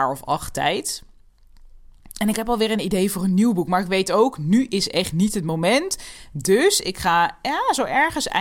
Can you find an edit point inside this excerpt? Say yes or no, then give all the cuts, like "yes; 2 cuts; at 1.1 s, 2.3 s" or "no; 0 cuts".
no; 0 cuts